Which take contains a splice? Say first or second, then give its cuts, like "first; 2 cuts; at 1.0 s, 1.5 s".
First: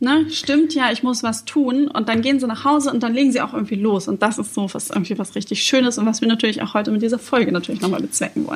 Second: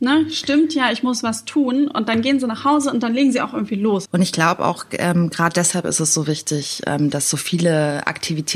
second; 1 cut; at 4.1 s